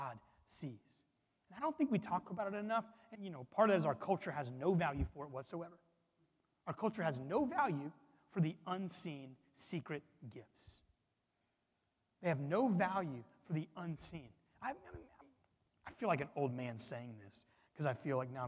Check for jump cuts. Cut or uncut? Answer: cut